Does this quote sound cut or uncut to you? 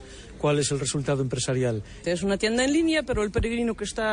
cut